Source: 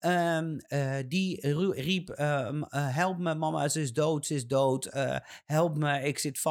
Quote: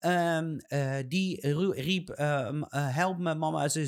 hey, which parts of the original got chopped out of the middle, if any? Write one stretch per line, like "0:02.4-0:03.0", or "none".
none